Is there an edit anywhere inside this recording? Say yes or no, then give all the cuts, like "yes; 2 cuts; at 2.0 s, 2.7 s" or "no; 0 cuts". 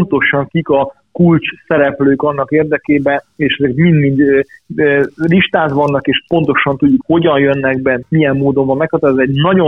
yes; 2 cuts; at 7.0 s, 8.0 s